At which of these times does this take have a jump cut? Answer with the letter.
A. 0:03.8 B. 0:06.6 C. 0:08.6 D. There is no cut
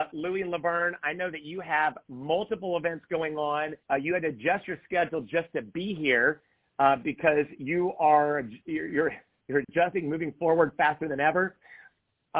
A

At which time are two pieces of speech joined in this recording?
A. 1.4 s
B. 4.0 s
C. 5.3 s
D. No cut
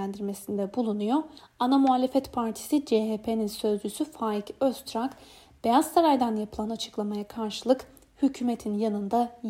A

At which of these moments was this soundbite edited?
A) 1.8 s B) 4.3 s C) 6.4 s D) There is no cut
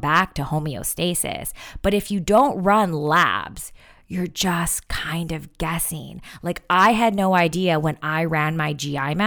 D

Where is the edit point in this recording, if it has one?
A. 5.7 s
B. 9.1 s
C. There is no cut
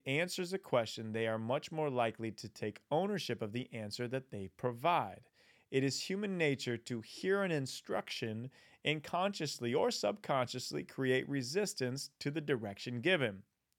C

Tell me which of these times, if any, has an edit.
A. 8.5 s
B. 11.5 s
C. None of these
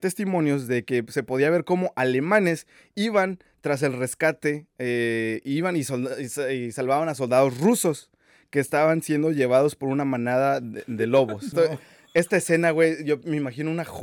B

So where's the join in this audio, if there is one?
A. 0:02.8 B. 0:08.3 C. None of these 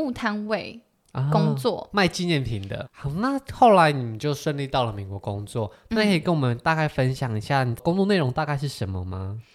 A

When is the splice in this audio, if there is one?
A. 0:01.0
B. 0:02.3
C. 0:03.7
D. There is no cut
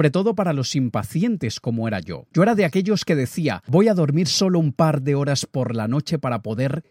C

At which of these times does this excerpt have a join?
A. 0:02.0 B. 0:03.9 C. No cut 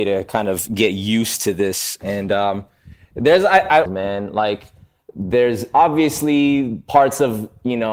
B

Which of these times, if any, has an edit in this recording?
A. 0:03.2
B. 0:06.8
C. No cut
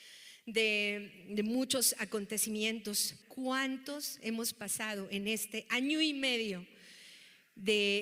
A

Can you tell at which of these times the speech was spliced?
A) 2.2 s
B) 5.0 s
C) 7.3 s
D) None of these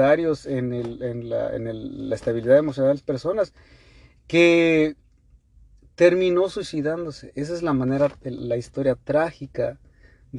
D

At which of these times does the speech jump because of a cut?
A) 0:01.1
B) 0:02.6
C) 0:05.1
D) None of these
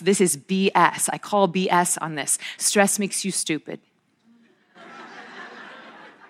D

